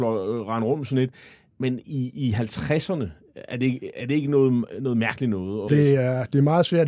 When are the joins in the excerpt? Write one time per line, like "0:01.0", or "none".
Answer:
0:05.7